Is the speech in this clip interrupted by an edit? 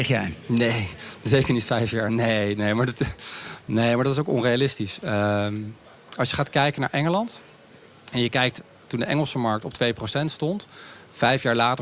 no; 0 cuts

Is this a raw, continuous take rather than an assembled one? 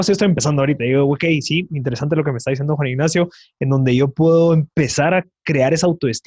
yes; 0 cuts

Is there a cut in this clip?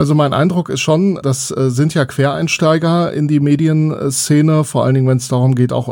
no; 0 cuts

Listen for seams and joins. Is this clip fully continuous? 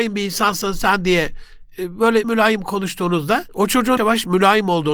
no; 2 cuts; at 2.2 s, 4.0 s

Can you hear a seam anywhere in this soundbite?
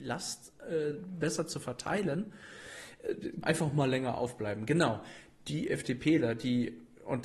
yes; 1 cut; at 3.4 s

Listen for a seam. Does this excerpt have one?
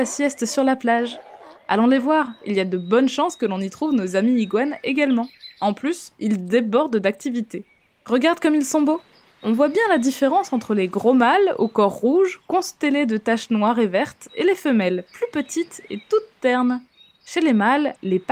yes; 1 cut; at 6.1 s

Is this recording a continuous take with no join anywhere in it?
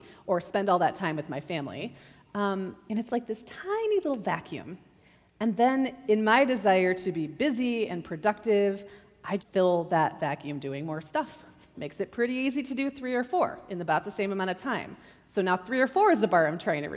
no; 3 cuts; at 2.9 s, 9.4 s, 11.7 s

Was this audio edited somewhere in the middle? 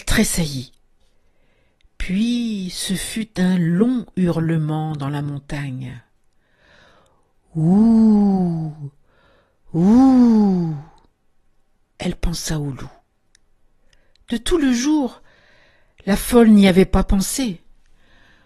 no; 0 cuts

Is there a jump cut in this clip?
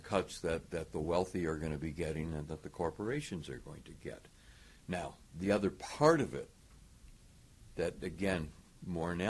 no; 0 cuts

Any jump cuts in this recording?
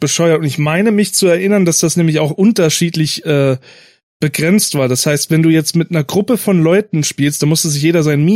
no; 0 cuts

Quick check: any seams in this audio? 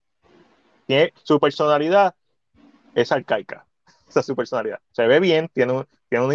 no; 0 cuts

